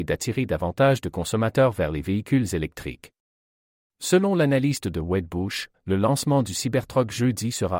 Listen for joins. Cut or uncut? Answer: cut